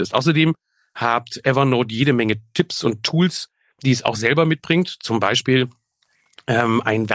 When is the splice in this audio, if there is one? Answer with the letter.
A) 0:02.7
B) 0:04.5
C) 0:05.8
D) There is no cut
D